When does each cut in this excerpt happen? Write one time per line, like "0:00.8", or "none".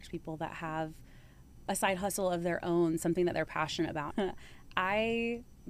0:01.7
0:04.1